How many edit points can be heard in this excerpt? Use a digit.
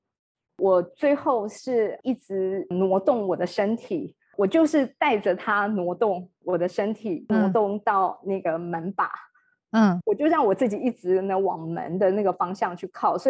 0